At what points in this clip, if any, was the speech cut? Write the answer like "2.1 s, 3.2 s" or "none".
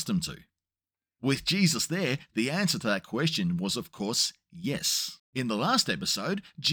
5.2 s